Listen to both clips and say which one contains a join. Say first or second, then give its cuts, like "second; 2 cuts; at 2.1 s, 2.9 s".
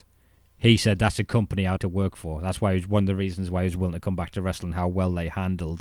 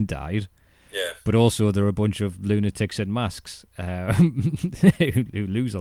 first; 1 cut; at 1.8 s